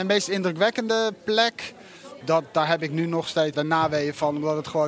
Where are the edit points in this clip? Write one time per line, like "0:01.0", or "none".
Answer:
0:02.2
0:03.5